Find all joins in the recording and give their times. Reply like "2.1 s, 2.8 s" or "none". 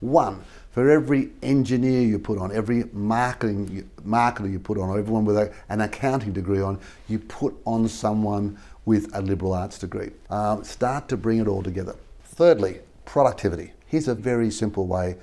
10.2 s, 14.2 s